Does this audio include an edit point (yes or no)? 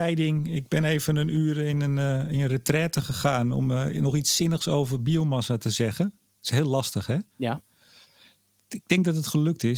yes